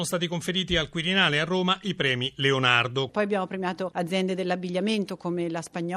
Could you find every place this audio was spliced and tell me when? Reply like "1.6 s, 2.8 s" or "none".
3.1 s